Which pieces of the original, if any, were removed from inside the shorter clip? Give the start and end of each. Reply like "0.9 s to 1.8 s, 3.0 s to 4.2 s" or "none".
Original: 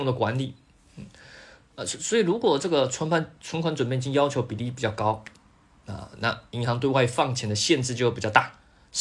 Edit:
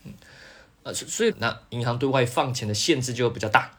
2.2 s to 6.1 s

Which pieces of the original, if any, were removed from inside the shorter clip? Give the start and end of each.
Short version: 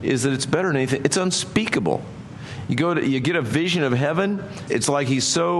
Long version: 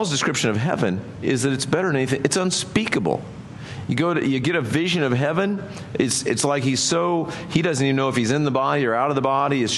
5.9 s to 6.2 s

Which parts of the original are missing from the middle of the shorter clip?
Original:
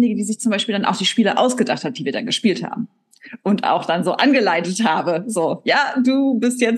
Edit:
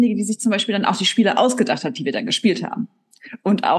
none

